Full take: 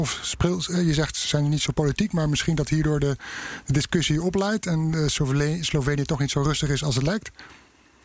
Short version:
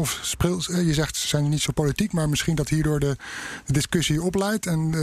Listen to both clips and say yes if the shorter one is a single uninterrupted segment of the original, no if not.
yes